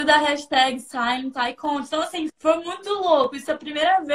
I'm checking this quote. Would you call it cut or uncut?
cut